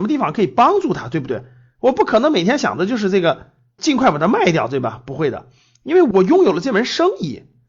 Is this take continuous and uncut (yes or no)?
yes